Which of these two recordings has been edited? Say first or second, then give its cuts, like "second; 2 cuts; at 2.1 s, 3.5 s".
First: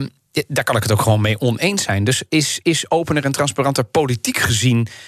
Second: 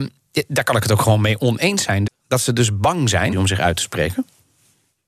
second; 2 cuts; at 2.1 s, 3.3 s